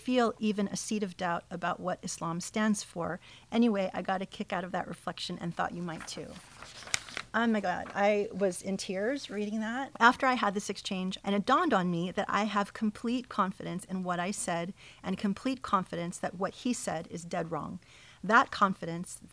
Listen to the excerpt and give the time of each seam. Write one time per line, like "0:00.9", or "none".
0:09.9
0:11.2

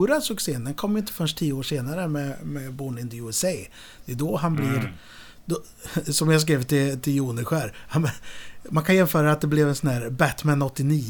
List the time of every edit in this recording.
none

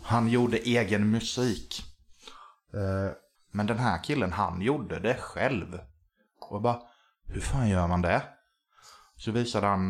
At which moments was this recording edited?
0:03.3

